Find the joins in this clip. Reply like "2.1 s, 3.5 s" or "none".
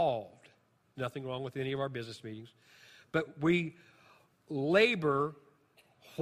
0.9 s